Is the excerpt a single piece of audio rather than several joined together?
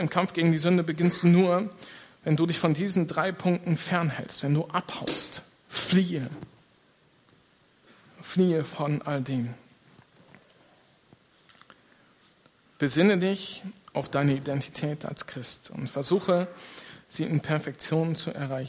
yes; 0 cuts

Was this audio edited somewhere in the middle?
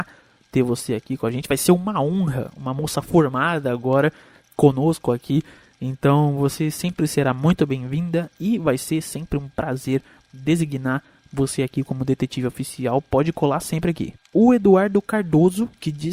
no; 0 cuts

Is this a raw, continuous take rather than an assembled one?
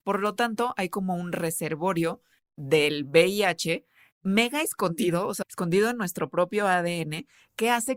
no; 1 cut; at 5.4 s

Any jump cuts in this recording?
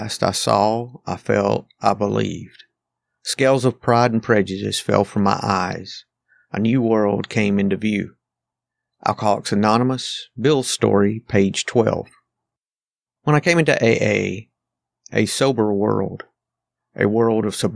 yes; 2 cuts; at 13.2 s, 15.0 s

